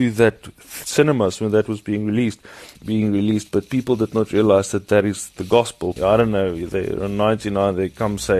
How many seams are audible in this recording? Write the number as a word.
two